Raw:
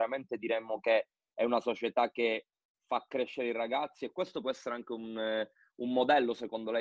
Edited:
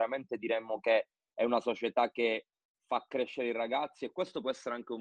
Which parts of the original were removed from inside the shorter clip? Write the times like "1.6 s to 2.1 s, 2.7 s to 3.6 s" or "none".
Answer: none